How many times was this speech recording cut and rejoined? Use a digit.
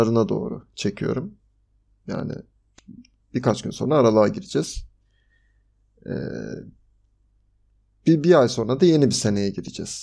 0